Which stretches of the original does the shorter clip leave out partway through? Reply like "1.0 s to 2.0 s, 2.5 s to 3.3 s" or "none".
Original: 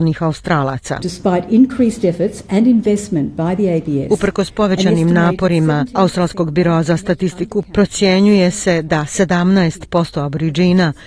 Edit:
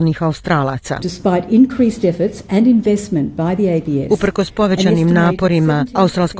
none